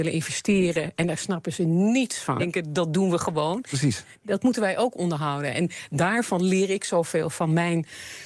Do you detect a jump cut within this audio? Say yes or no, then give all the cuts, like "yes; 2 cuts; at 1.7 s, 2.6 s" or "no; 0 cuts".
yes; 1 cut; at 2.4 s